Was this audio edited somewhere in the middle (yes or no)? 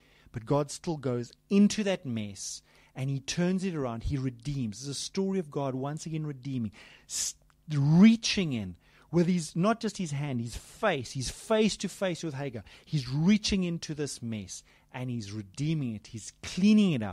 no